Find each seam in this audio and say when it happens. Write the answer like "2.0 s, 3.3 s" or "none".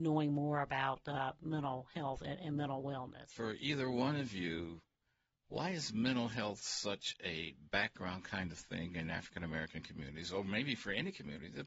none

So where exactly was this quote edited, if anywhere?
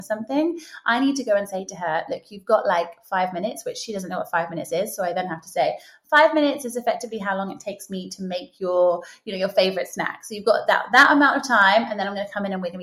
none

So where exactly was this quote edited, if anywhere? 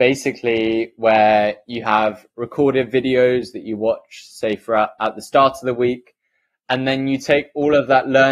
none

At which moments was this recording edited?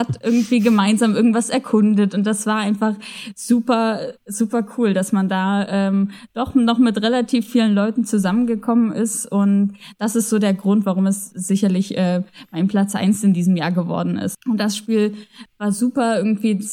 14.3 s, 15.5 s

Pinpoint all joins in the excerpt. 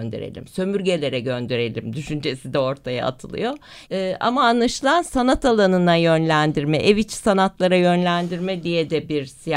3.8 s

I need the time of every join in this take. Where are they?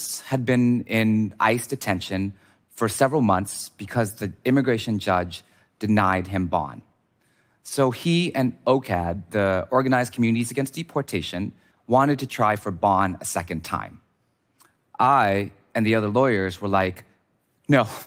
11.7 s

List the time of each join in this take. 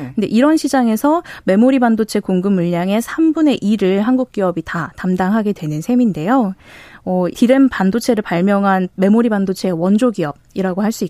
7.3 s

